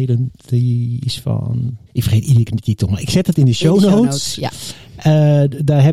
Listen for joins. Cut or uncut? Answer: cut